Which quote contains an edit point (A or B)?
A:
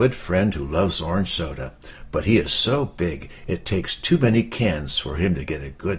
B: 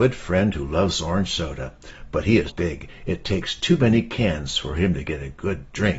B